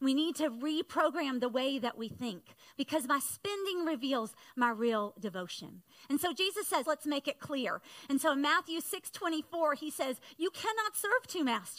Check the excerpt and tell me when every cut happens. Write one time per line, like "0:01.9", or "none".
0:06.8